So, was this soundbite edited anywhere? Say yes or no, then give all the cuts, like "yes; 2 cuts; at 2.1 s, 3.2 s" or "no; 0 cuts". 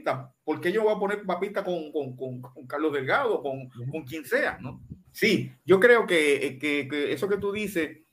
yes; 1 cut; at 5.0 s